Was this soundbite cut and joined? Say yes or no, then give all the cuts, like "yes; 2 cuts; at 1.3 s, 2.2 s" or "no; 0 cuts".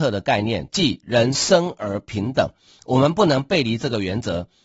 no; 0 cuts